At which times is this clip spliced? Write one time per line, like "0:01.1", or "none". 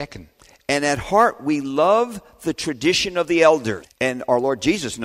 0:03.8